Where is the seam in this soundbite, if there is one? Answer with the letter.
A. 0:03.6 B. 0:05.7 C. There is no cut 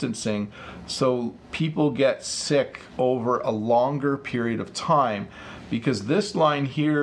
C